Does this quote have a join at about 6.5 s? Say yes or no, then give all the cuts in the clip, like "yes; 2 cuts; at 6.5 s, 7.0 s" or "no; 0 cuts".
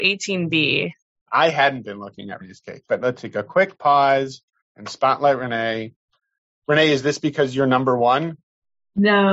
no; 1 cut; at 1.2 s